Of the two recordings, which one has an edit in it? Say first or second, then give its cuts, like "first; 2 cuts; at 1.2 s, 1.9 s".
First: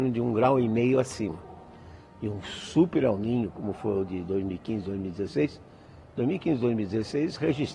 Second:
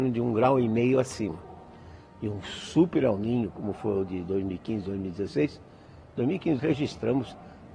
second; 1 cut; at 6.6 s